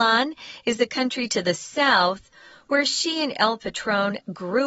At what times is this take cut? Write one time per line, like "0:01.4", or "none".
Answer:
none